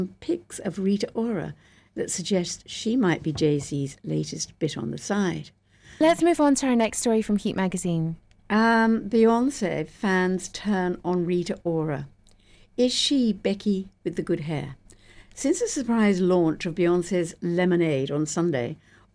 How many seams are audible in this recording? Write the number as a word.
one